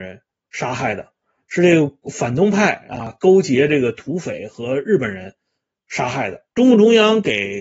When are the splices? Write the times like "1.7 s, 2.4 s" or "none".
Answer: 6.5 s